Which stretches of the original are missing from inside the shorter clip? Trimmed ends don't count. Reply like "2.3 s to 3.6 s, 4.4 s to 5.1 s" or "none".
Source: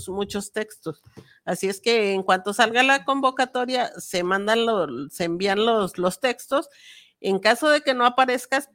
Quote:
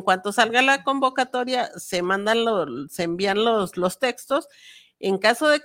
none